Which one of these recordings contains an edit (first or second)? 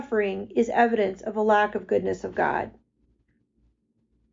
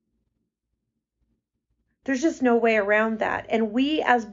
second